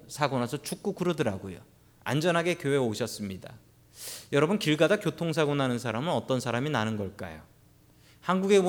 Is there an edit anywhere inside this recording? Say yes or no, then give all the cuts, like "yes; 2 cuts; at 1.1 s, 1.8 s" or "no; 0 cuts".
yes; 1 cut; at 2.0 s